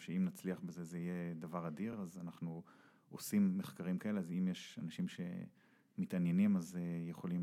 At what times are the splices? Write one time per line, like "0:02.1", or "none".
none

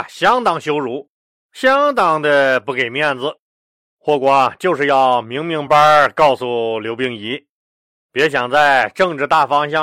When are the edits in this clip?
0:05.7

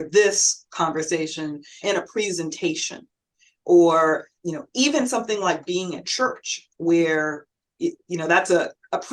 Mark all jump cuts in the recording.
0:01.8
0:04.4

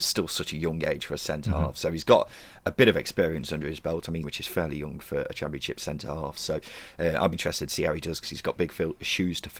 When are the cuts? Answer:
0:04.2
0:07.3

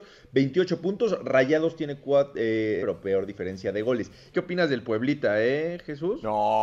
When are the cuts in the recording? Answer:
0:02.8
0:04.3

